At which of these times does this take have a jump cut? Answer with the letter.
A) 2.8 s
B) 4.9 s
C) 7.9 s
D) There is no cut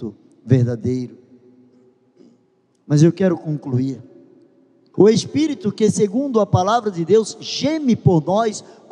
B